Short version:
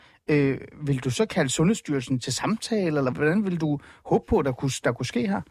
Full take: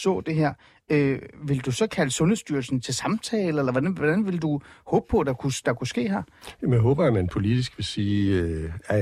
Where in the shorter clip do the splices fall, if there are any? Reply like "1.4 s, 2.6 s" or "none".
3.1 s